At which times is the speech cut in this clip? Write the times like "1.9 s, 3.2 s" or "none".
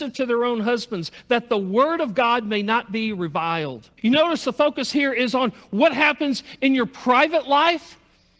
4.0 s